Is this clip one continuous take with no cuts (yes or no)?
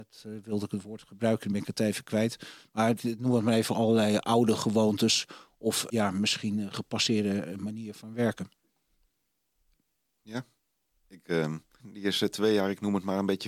no